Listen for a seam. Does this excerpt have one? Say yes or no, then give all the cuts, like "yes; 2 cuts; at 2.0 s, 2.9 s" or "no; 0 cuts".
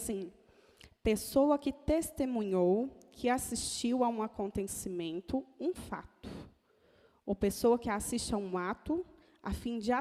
no; 0 cuts